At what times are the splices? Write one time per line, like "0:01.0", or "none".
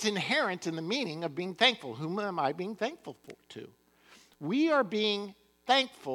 none